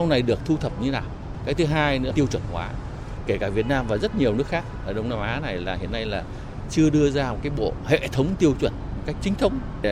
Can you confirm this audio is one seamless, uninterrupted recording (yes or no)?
yes